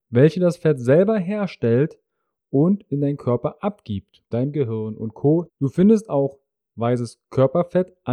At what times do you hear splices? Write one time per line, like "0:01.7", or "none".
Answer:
0:04.3
0:05.5